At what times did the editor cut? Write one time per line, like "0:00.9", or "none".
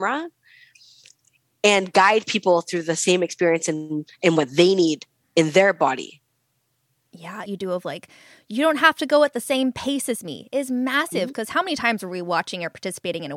0:07.5